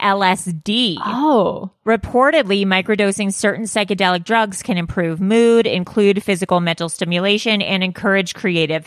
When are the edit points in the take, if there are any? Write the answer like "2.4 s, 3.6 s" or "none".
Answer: none